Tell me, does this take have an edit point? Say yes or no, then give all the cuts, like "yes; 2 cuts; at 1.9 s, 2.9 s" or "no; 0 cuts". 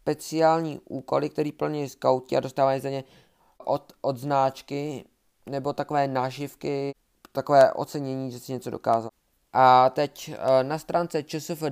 no; 0 cuts